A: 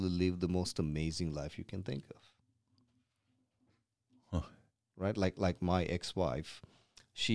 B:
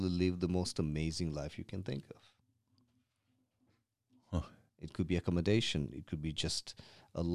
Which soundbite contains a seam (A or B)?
B